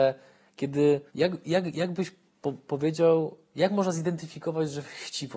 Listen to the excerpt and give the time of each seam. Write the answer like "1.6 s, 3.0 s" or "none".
1.1 s